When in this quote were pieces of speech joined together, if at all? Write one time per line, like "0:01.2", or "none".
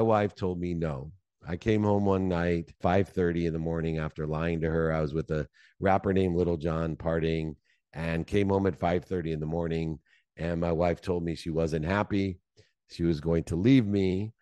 none